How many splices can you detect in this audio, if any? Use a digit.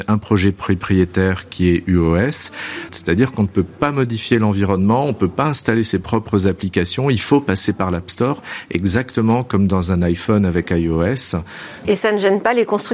2